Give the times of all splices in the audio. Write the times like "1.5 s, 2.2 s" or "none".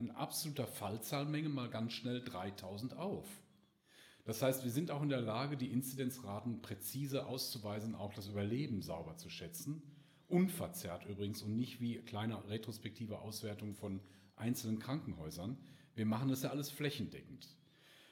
none